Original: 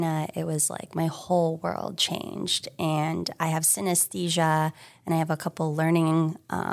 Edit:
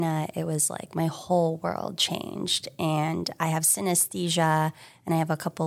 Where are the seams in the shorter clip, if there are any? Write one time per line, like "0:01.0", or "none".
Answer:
none